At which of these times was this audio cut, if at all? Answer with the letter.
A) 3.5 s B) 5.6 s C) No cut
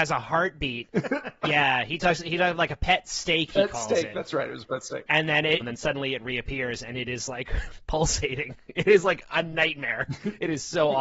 B